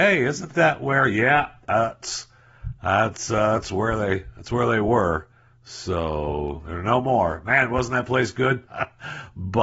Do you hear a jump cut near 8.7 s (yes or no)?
yes